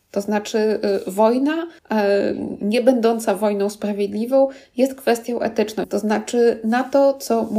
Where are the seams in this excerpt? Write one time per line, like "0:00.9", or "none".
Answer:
0:01.8
0:05.8